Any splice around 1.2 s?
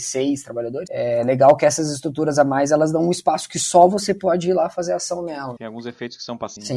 no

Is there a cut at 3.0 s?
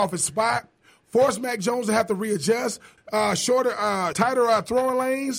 yes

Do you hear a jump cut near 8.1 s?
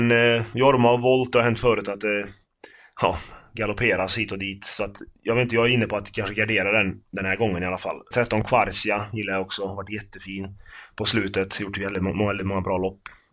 yes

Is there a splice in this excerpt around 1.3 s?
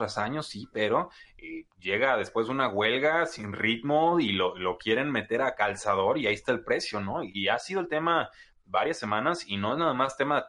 no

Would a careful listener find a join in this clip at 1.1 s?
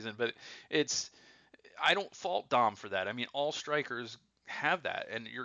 no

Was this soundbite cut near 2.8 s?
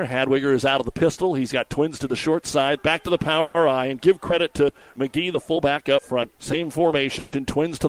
yes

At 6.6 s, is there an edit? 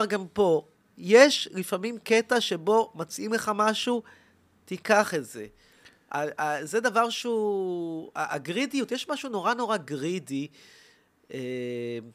no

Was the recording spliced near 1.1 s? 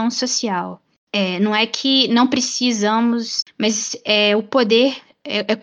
yes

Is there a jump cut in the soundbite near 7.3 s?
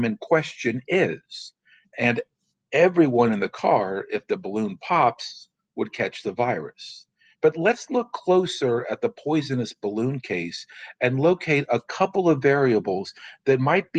yes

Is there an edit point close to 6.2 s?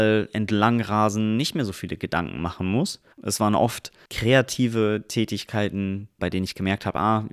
yes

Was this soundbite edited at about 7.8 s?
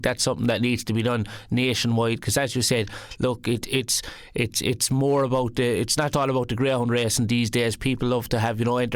no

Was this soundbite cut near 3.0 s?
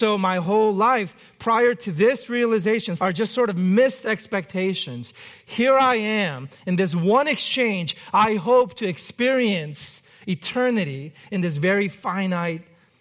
yes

